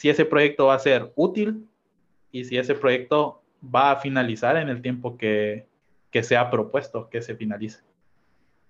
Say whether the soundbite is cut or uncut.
uncut